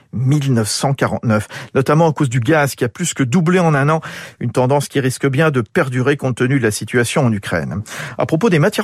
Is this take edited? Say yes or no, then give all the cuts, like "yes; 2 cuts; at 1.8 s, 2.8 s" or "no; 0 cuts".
no; 0 cuts